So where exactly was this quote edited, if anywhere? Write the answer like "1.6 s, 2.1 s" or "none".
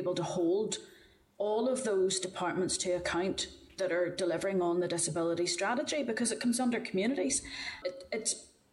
7.8 s

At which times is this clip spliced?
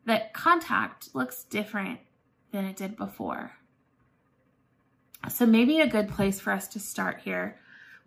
1.1 s, 5.1 s

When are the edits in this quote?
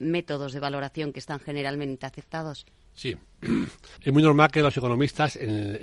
4.0 s

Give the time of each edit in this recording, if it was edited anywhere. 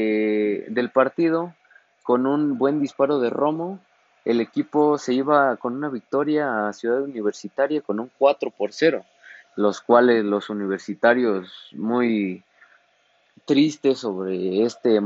13.3 s

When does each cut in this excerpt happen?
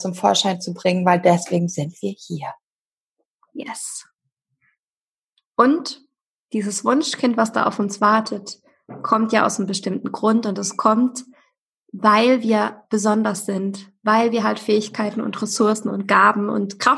none

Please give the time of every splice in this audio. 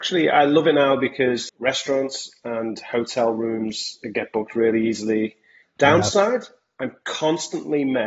1.5 s, 5.6 s

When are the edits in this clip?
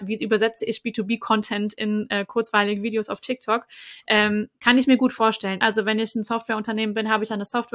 5.6 s

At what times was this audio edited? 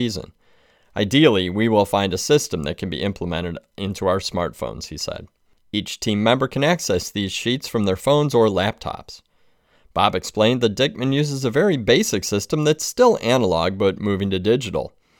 5.6 s

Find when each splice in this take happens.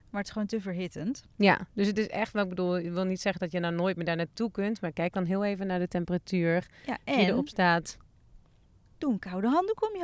none

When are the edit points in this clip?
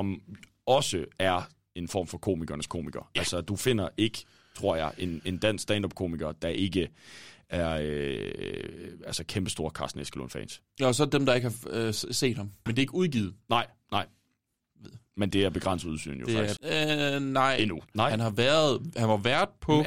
12.7 s, 16.6 s, 17.9 s

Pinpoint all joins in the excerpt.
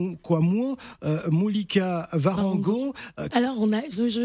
3.3 s

